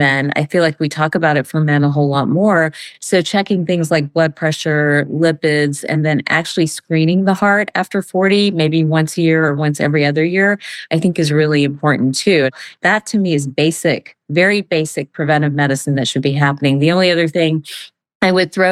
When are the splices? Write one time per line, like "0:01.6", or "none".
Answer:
none